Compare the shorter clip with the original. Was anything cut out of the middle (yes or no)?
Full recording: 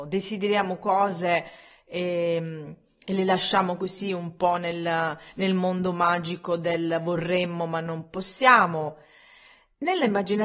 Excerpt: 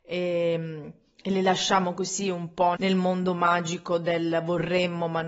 yes